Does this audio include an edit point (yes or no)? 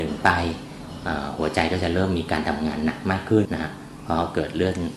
yes